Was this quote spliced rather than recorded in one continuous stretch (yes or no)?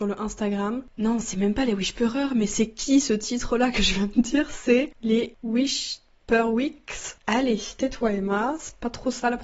no